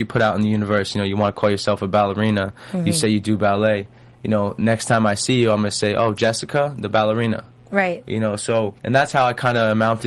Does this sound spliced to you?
yes; 1 cut; at 8.8 s

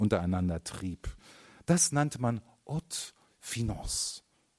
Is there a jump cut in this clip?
no; 0 cuts

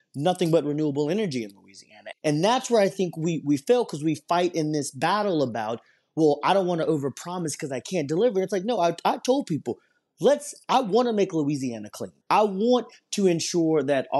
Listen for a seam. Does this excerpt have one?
yes; 2 cuts; at 2.1 s, 12.2 s

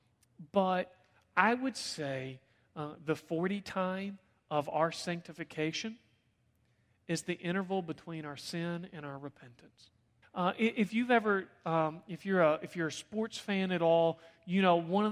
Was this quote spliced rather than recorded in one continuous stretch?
yes; 1 cut; at 10.2 s

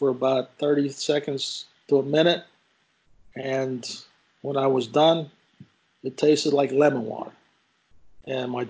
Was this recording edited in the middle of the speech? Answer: no; 0 cuts

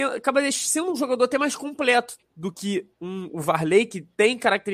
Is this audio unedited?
no; 1 cut; at 2.9 s

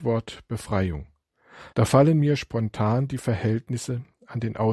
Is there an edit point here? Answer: yes; 1 cut; at 1.7 s

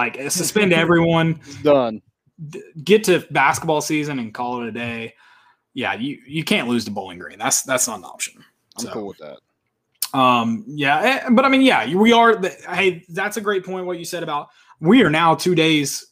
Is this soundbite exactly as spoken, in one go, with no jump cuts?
yes; 0 cuts

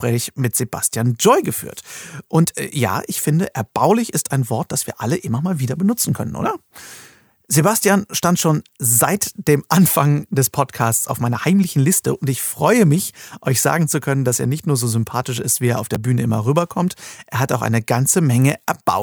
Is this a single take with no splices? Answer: yes; 0 cuts

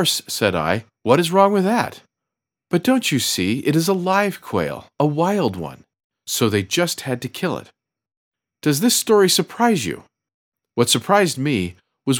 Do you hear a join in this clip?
no; 0 cuts

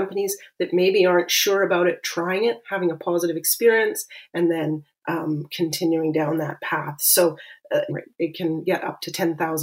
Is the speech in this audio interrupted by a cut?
yes; 1 cut; at 7.9 s

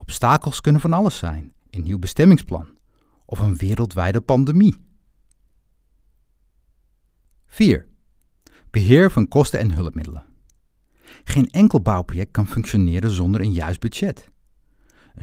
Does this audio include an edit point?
yes; 1 cut; at 1.6 s

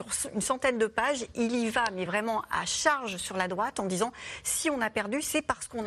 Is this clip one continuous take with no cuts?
yes; 0 cuts

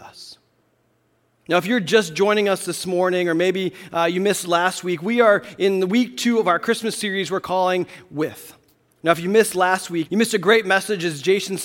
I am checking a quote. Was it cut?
yes; 2 cuts; at 9.0 s, 10.1 s

